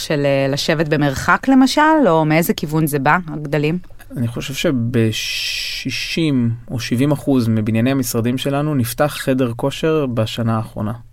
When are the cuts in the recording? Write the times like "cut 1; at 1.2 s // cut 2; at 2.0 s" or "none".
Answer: cut 1; at 4.1 s